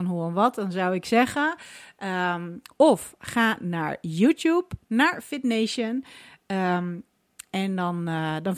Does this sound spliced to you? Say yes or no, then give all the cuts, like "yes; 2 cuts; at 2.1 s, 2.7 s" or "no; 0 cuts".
no; 0 cuts